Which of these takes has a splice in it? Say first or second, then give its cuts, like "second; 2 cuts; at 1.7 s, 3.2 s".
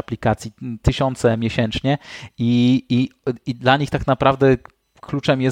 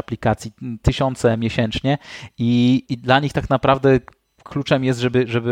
second; 1 cut; at 2.9 s